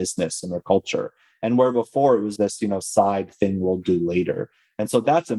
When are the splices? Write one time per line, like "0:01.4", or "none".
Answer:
0:02.4